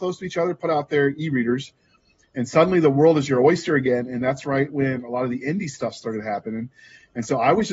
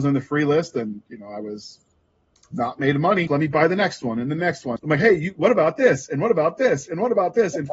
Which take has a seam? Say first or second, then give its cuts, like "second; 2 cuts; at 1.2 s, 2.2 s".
second; 2 cuts; at 3.3 s, 4.8 s